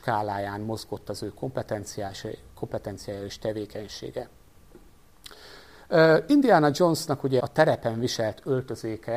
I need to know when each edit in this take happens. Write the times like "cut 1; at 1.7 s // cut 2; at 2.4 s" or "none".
cut 1; at 7.4 s